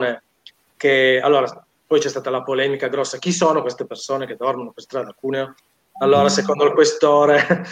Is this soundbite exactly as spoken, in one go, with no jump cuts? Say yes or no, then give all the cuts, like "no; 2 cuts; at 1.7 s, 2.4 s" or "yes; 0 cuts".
yes; 0 cuts